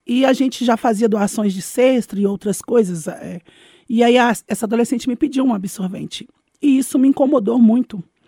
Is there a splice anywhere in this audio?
no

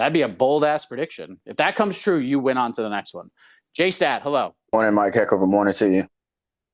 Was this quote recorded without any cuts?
yes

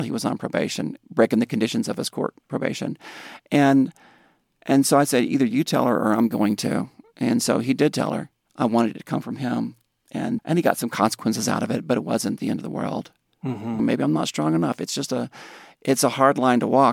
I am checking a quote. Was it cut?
yes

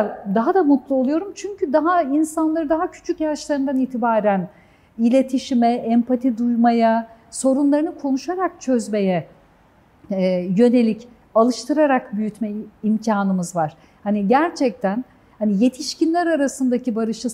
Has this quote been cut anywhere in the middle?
no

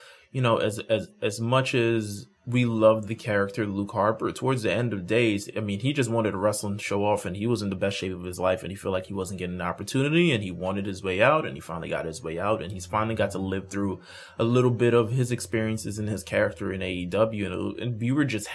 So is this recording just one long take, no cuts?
no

